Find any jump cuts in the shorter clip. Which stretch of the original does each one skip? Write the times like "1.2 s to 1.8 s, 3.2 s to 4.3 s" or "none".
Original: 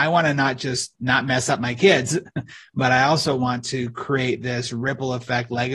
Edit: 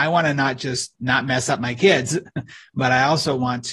none